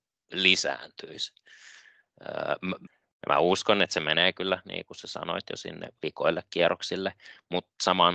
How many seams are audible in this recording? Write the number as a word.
one